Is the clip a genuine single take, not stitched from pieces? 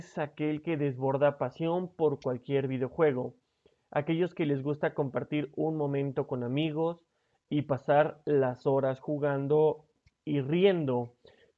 yes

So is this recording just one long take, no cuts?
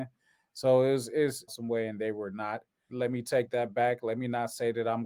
no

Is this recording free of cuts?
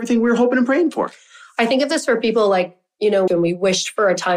no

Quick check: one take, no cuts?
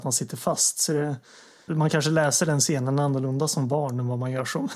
no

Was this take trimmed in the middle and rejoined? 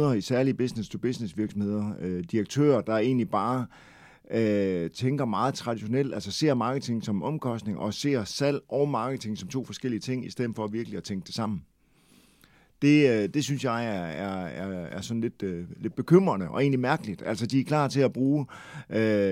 no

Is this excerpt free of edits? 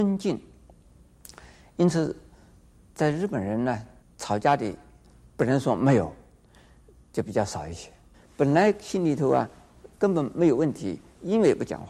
no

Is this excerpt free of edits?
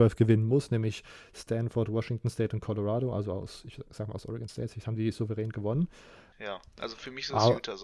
no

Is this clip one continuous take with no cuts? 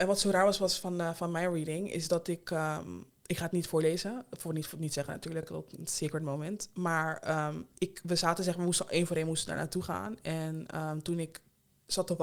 yes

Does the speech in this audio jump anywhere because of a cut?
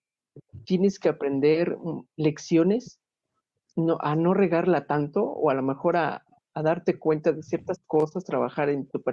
no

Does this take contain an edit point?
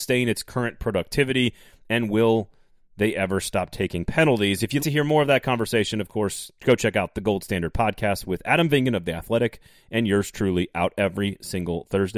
yes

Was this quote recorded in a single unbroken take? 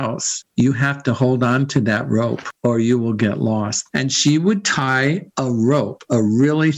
no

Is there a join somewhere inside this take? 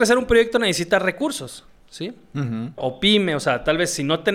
yes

